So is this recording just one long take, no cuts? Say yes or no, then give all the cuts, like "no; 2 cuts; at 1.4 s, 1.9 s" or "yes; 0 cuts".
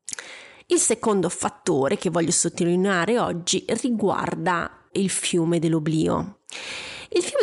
no; 1 cut; at 4.9 s